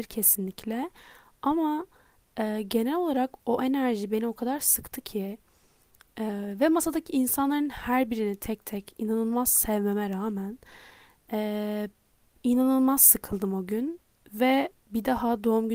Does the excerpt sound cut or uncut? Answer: uncut